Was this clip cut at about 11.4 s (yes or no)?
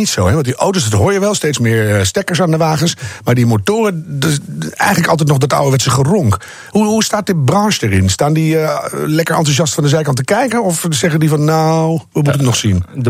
no